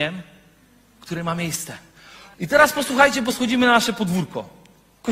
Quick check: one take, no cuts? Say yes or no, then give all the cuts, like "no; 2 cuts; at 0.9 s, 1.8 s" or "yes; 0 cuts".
no; 1 cut; at 2.3 s